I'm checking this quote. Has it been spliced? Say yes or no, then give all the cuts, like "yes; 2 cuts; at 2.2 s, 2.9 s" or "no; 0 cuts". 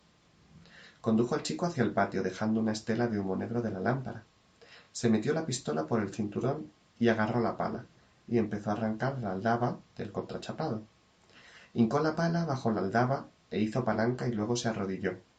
no; 0 cuts